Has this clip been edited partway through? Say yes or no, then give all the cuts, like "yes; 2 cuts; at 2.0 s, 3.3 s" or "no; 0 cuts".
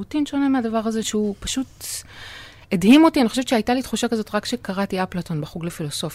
yes; 1 cut; at 1.0 s